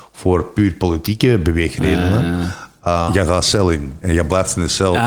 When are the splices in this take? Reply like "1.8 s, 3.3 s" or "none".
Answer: 3.1 s